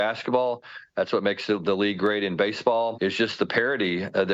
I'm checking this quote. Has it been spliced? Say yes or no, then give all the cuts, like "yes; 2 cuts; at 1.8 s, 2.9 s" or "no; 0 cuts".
yes; 1 cut; at 2.9 s